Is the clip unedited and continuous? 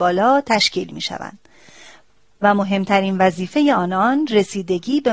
yes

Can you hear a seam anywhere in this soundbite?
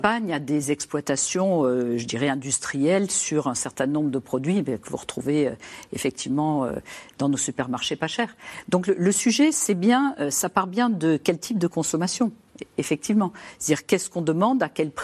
no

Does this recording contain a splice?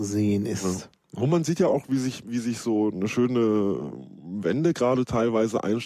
no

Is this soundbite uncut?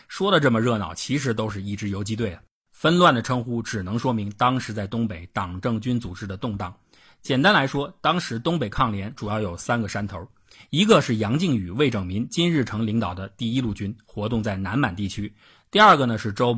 yes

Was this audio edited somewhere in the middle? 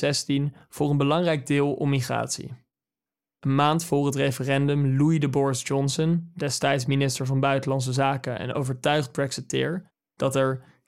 no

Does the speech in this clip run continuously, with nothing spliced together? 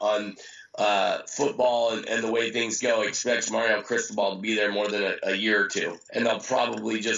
no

